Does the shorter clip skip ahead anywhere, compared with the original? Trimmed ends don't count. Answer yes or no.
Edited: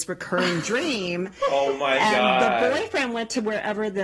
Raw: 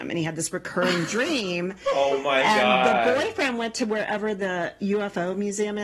no